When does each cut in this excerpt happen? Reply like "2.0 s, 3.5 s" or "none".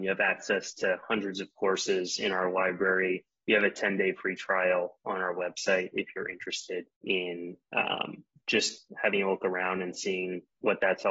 6.9 s